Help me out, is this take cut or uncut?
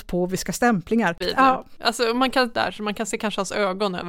cut